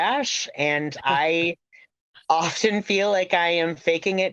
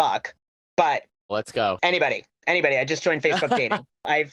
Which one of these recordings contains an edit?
second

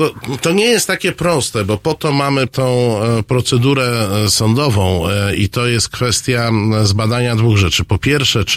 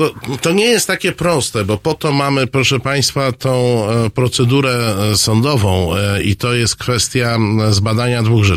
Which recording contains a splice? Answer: first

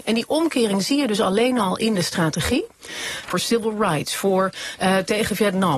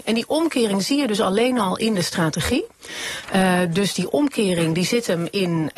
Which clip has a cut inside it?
first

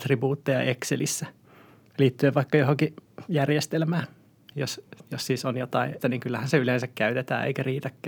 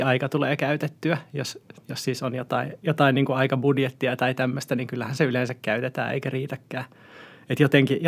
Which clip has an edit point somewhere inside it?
first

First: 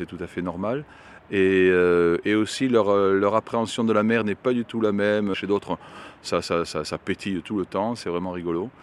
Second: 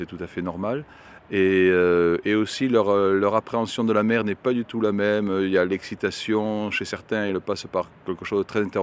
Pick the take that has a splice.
first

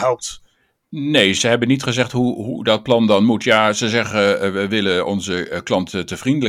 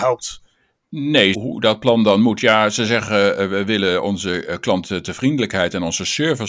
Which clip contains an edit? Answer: second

